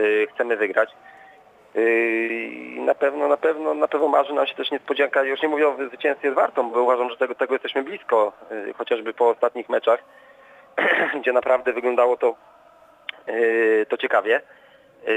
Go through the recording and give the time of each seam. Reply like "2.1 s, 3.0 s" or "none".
6.7 s